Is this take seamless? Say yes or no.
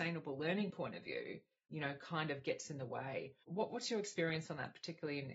no